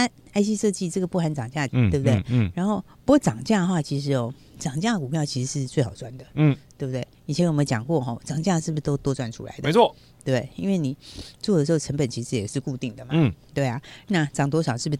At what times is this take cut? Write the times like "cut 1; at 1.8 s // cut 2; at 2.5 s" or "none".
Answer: cut 1; at 1.7 s